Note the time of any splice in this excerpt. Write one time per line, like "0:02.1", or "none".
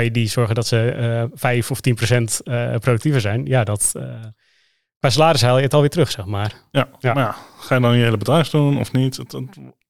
none